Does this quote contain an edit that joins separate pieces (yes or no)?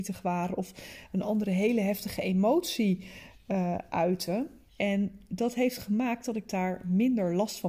yes